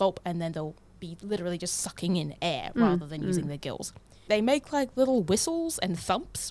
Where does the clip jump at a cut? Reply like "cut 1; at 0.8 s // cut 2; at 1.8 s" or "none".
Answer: cut 1; at 4.3 s